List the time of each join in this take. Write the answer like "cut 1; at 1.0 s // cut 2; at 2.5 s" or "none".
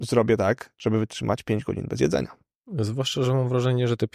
none

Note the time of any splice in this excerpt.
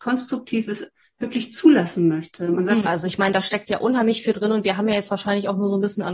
cut 1; at 2.8 s

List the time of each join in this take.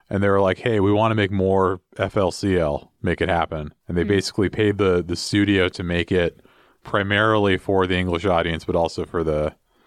none

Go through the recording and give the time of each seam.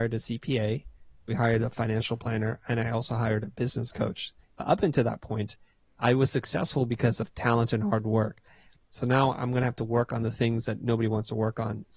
cut 1; at 4.4 s // cut 2; at 8.7 s

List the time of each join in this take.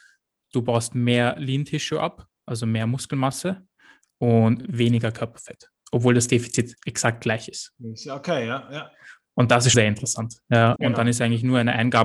cut 1; at 9.7 s // cut 2; at 10.8 s

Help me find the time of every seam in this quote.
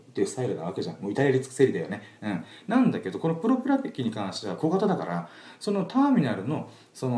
none

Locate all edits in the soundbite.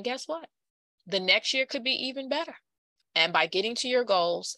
cut 1; at 3.0 s

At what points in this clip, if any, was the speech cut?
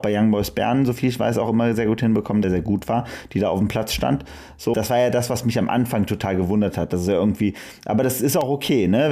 cut 1; at 2.4 s // cut 2; at 4.7 s

